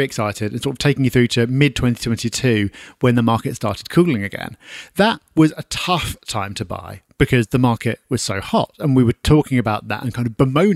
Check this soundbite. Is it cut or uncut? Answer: uncut